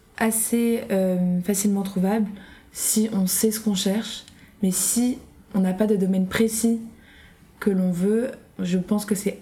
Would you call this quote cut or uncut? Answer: uncut